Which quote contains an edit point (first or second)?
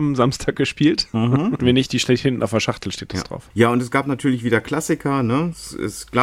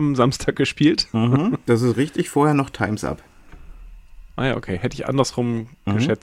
first